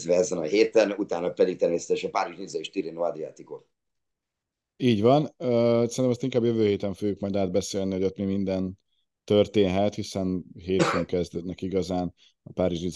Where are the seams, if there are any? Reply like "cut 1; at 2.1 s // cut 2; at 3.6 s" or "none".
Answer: none